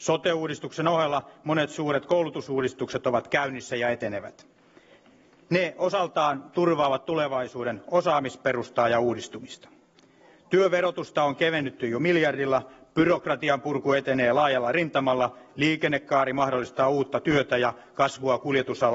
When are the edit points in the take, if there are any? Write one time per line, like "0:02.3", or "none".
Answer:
none